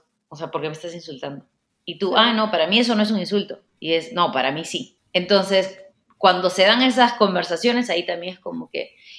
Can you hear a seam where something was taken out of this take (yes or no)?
no